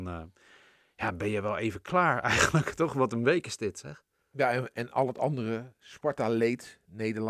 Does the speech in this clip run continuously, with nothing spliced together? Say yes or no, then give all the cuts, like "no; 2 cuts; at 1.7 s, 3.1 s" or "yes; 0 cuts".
yes; 0 cuts